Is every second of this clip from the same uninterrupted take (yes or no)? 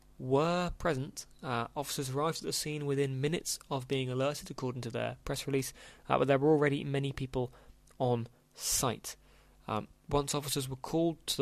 yes